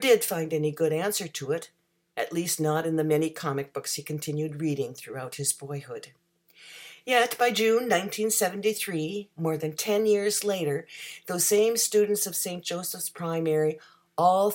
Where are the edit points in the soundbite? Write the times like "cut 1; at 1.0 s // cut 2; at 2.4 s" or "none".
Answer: none